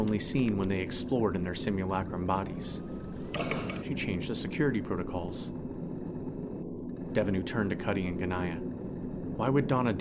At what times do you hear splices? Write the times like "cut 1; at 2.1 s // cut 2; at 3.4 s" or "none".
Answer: cut 1; at 3.8 s